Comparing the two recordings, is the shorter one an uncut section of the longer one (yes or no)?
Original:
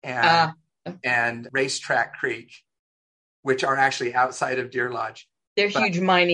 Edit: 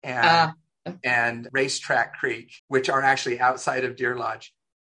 no